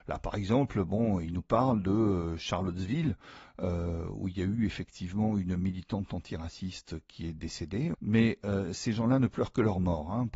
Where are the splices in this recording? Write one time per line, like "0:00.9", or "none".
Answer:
0:07.9